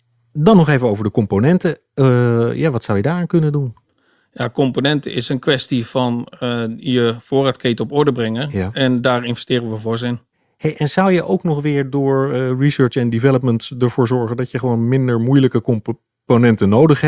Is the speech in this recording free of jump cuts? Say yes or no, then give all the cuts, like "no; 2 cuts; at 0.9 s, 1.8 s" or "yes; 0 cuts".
yes; 0 cuts